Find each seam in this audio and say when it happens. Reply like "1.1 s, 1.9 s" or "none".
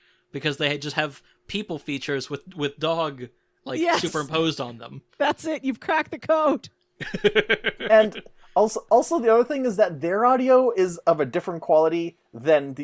none